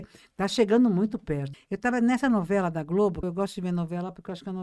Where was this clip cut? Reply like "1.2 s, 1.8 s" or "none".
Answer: 1.5 s, 3.2 s